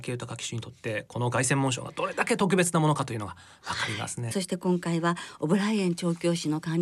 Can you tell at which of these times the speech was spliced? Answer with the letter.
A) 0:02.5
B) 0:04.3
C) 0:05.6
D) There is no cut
B